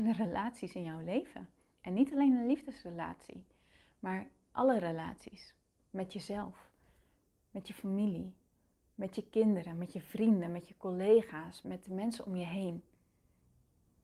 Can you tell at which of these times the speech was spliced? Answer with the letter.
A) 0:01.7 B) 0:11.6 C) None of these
B